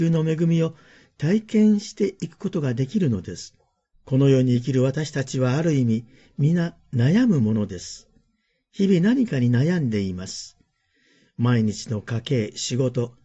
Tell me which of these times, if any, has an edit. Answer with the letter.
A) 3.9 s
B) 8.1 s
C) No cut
A